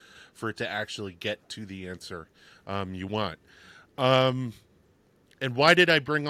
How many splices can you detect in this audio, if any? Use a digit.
0